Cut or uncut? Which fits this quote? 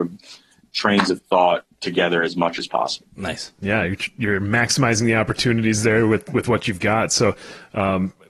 uncut